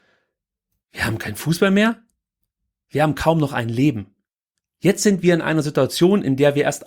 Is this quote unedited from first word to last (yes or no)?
no